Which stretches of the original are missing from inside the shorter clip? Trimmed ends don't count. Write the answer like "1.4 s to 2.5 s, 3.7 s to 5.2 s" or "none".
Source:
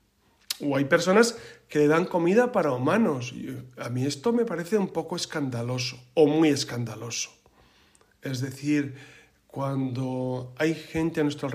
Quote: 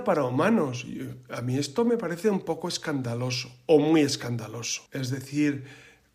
7.3 s to 8.2 s